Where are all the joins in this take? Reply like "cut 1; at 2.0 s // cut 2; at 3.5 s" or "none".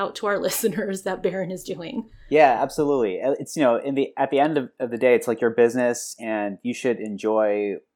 none

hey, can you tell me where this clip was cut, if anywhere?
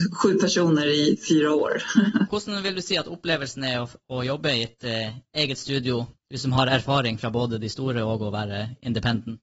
cut 1; at 2.3 s // cut 2; at 6.2 s

